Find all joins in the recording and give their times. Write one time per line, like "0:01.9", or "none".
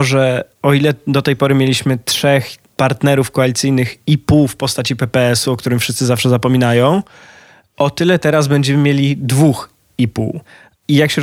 none